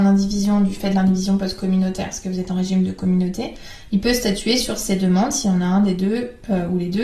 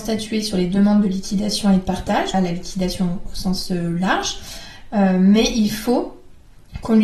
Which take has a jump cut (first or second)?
second